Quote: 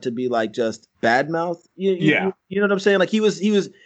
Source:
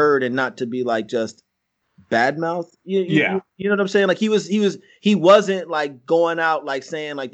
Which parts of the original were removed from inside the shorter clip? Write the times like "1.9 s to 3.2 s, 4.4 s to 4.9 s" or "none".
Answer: 1.5 s to 2.0 s